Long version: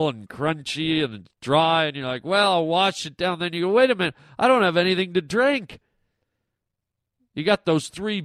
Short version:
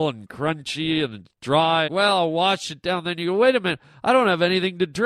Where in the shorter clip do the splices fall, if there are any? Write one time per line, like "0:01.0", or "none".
0:01.9